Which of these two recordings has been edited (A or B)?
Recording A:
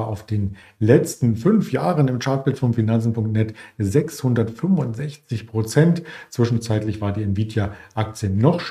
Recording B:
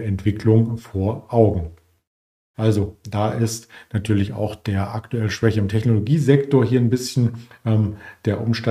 B